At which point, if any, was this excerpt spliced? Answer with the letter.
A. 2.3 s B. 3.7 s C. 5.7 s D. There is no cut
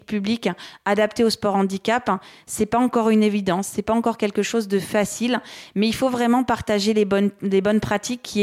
D